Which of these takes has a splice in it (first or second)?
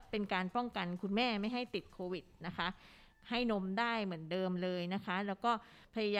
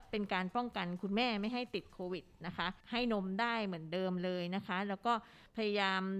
second